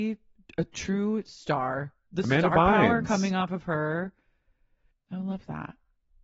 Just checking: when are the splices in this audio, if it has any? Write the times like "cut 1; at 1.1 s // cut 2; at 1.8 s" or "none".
cut 1; at 4.9 s